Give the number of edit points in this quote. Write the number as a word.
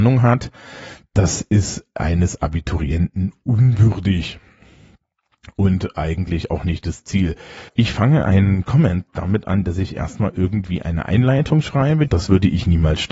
two